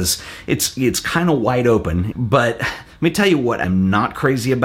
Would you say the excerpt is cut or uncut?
cut